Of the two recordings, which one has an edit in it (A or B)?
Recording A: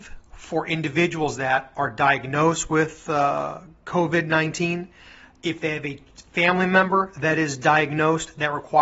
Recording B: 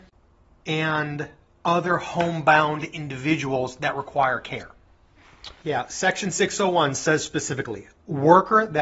B